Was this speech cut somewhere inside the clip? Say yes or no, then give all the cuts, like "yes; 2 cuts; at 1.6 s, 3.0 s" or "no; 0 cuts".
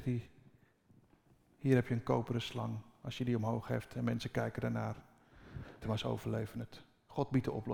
yes; 1 cut; at 5.8 s